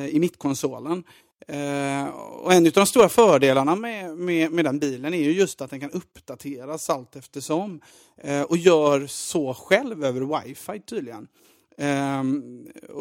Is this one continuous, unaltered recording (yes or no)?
yes